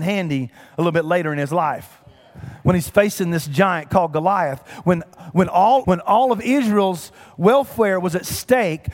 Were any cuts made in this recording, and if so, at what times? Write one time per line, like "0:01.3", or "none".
0:05.8